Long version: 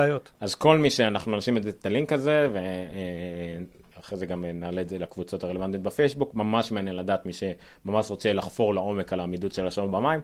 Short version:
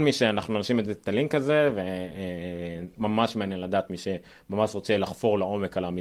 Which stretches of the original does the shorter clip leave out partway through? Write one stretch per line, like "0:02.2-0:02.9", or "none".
0:03.7-0:06.3